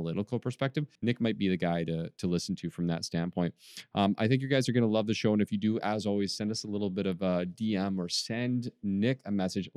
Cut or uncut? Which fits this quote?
cut